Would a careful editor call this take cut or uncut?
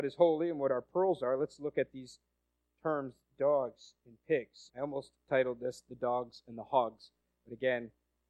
cut